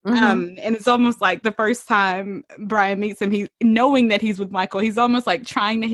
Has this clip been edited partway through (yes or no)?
no